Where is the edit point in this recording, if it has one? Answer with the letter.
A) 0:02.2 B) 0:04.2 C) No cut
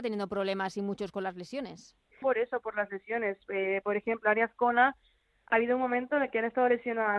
A